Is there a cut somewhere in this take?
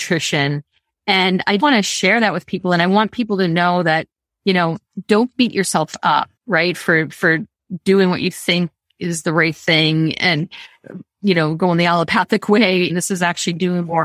yes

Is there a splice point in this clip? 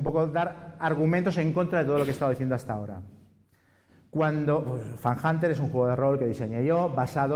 no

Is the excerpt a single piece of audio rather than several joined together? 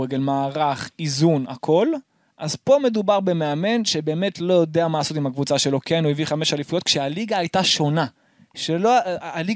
yes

